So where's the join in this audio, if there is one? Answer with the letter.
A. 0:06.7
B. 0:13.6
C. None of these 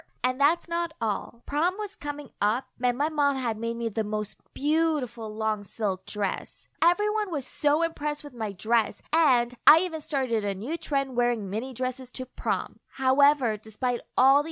A